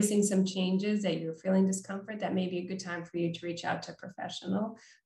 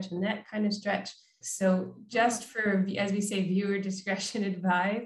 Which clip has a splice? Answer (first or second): second